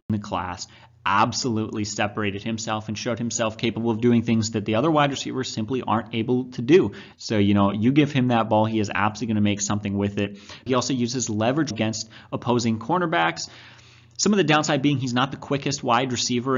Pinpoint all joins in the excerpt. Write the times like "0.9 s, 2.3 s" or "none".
7.1 s, 10.7 s, 11.7 s

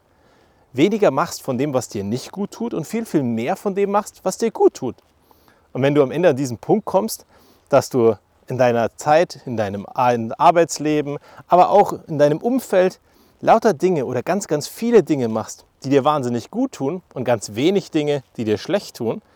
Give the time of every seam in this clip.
none

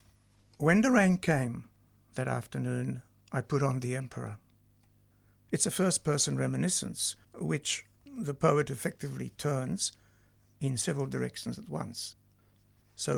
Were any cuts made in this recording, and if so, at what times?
5.4 s, 7.2 s

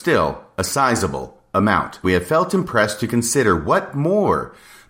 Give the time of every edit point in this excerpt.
2.0 s

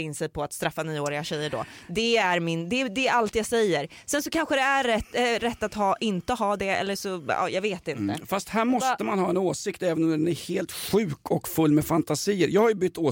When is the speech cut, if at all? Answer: none

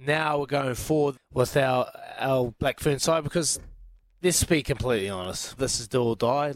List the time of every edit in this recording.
1.1 s, 5.6 s

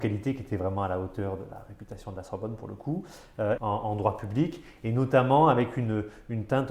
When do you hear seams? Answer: 3.6 s

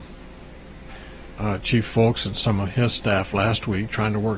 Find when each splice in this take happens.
1.4 s

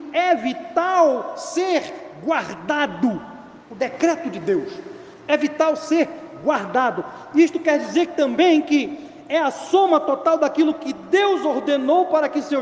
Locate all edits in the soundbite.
3.6 s

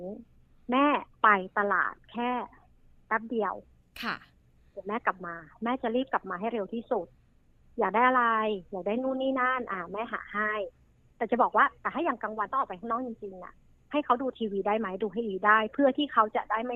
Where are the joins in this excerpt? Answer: none

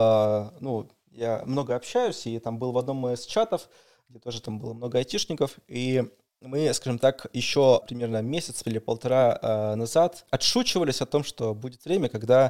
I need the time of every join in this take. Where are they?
none

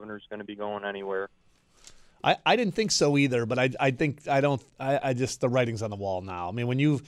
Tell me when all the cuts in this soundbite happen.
none

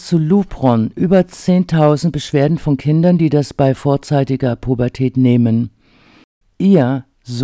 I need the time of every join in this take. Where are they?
6.4 s

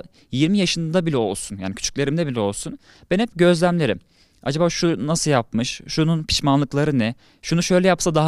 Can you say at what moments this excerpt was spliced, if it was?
none

